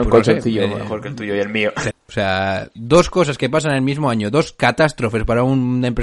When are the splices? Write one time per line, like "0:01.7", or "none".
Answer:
0:01.9